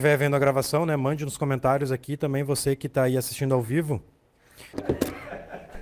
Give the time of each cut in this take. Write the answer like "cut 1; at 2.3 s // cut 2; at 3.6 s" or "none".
cut 1; at 4.7 s